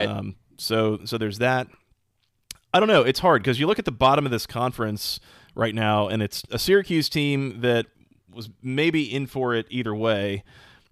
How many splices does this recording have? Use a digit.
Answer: 0